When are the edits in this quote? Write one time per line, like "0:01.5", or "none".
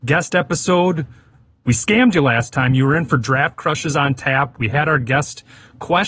none

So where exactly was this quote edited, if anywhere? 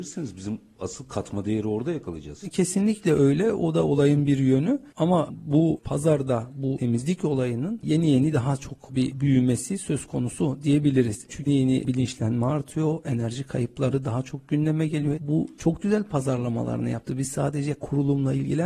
0:11.5
0:15.2

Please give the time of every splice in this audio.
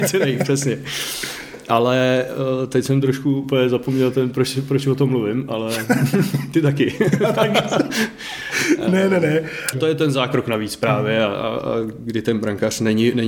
0:09.7

